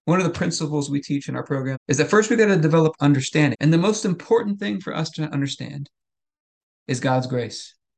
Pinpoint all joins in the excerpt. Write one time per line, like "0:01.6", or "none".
0:01.7
0:03.5